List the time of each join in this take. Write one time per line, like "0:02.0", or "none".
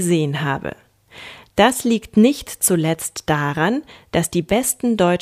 none